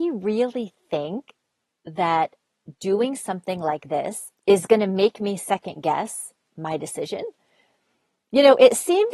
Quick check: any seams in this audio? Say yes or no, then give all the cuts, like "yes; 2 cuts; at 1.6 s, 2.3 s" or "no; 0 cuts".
yes; 1 cut; at 4.3 s